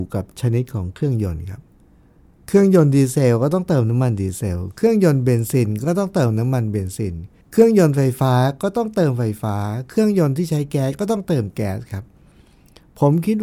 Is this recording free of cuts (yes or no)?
no